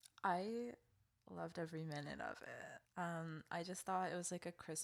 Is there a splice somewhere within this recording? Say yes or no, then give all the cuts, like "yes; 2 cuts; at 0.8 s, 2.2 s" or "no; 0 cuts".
yes; 1 cut; at 2.9 s